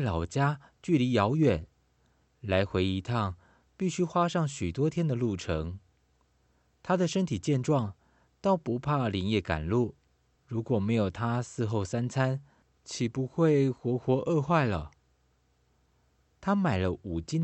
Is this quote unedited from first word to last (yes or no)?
no